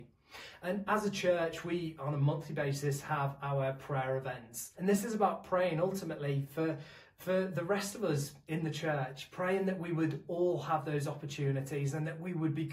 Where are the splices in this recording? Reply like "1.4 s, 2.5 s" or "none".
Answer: 1.9 s, 4.7 s